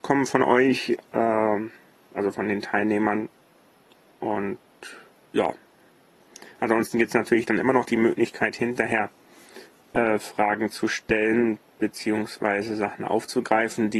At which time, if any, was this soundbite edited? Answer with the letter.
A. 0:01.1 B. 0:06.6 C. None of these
C